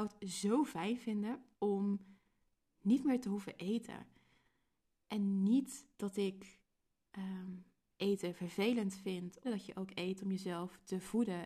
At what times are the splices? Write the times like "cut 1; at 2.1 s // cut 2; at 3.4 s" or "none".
cut 1; at 1.5 s // cut 2; at 9.4 s